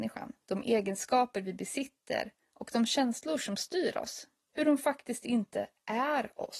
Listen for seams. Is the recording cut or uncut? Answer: uncut